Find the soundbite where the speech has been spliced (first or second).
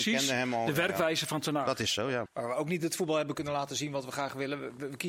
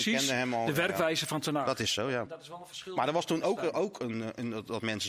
first